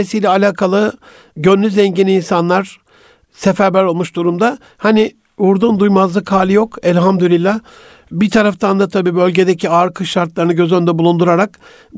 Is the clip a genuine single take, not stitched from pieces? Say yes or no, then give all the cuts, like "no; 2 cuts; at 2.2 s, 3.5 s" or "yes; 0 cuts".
yes; 0 cuts